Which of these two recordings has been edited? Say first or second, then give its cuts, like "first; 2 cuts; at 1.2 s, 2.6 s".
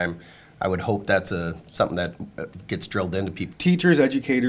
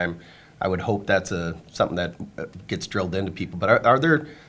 first; 1 cut; at 3.5 s